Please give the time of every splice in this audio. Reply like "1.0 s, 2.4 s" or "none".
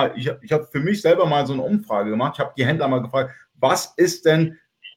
none